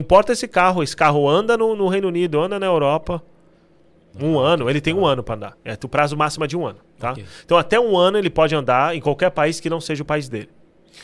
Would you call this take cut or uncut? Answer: cut